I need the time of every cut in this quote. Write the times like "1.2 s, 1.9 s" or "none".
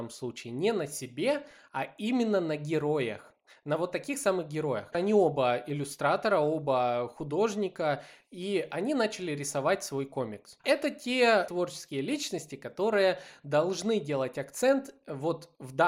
4.9 s, 10.6 s